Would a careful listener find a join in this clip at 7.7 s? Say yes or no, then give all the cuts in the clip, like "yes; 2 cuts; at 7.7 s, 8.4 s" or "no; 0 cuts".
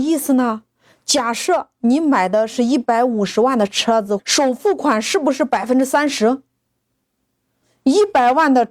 no; 1 cut; at 4.2 s